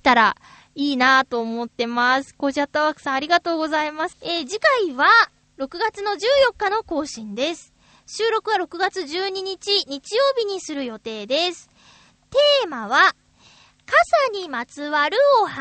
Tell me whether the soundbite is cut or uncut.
cut